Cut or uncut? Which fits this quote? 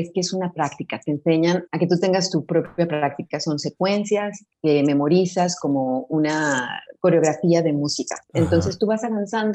cut